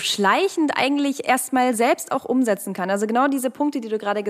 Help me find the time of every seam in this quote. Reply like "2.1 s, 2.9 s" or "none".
none